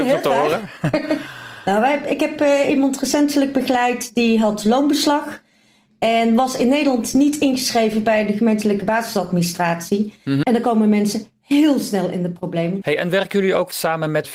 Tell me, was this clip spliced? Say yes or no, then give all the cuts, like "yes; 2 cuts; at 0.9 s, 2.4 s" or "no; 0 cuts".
yes; 2 cuts; at 10.4 s, 12.8 s